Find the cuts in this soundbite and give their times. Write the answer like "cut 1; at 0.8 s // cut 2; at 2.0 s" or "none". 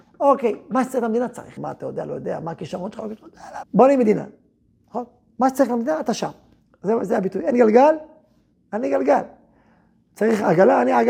cut 1; at 1.6 s // cut 2; at 3.6 s